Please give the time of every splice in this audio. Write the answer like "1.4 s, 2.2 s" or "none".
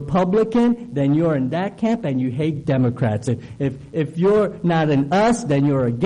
none